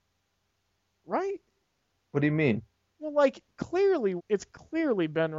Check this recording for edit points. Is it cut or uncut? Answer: cut